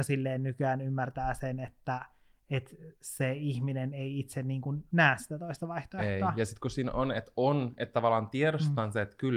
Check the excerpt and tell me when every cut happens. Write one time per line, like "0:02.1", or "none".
none